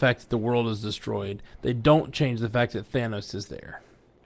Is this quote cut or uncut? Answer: uncut